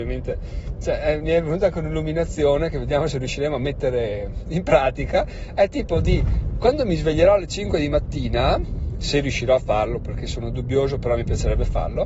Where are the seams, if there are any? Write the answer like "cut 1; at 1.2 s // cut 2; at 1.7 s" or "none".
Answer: none